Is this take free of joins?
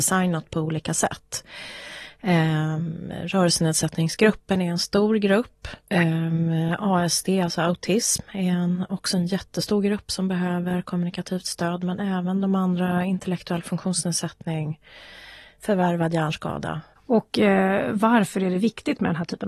no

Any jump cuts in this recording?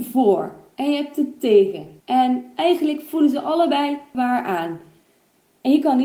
yes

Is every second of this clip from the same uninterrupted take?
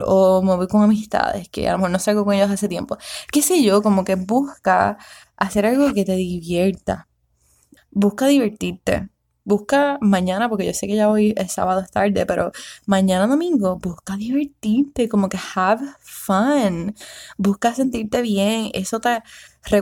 no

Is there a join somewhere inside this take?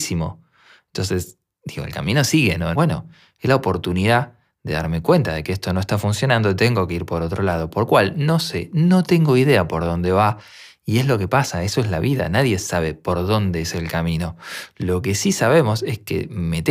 yes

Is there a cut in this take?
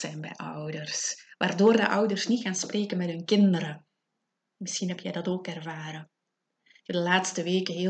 no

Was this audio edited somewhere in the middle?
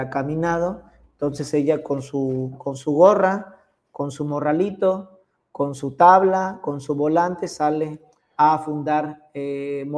no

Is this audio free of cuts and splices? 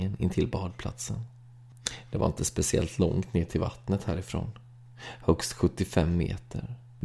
yes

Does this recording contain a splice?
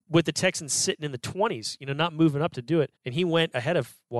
yes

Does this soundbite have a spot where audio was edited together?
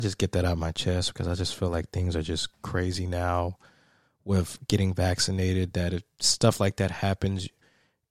no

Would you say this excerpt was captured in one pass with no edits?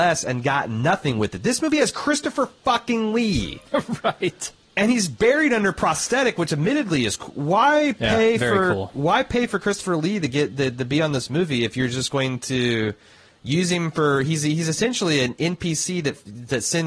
yes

